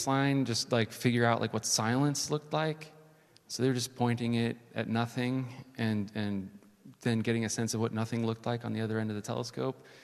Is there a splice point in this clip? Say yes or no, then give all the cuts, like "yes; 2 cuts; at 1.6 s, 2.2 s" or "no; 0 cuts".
no; 0 cuts